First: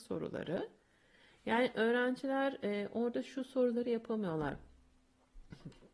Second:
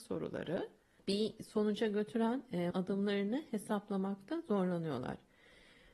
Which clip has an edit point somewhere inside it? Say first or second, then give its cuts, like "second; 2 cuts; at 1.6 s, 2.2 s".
second; 2 cuts; at 1.0 s, 2.7 s